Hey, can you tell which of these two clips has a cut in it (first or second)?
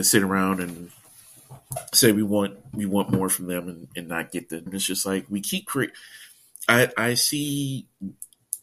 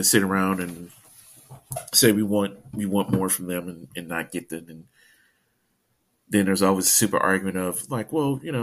first